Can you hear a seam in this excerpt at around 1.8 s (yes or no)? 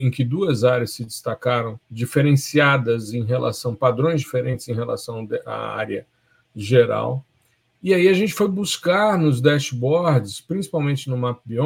yes